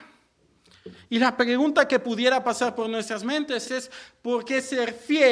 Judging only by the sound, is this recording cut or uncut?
cut